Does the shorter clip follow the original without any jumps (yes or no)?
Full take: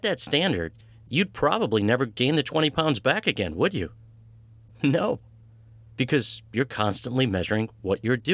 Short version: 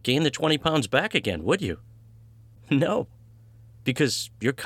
yes